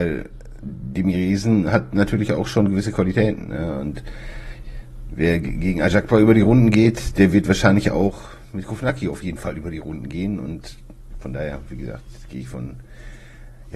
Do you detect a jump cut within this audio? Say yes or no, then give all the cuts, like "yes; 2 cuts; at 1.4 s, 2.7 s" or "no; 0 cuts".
no; 0 cuts